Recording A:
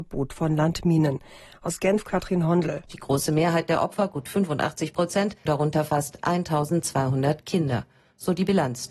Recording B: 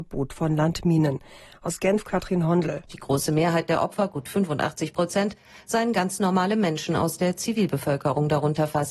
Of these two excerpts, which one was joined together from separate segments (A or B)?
A